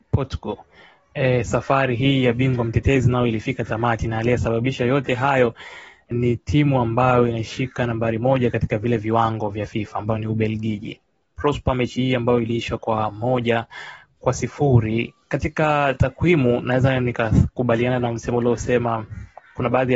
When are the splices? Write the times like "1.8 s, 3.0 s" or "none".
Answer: 6.1 s, 15.2 s